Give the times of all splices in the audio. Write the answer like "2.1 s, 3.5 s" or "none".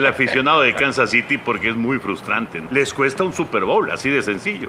2.7 s

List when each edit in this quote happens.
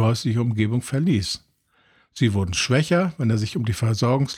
none

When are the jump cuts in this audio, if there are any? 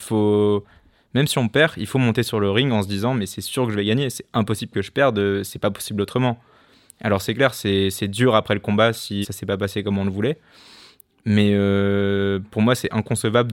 9.2 s

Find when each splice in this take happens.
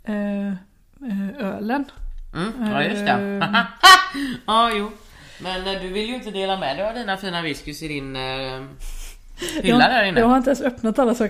3.8 s

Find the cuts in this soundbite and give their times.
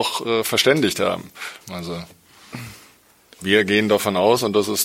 1.6 s

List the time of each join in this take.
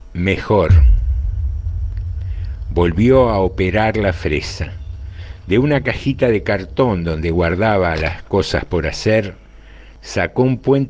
none

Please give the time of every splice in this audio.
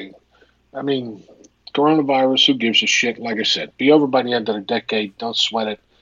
none

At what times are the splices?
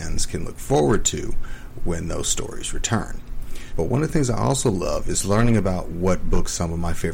3.7 s

